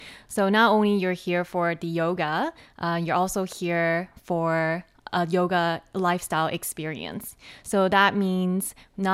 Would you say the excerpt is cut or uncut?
uncut